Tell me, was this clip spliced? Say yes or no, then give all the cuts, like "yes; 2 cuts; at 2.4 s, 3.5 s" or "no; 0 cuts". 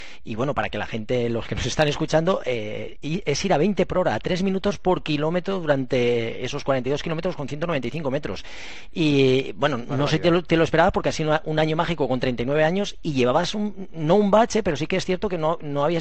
no; 0 cuts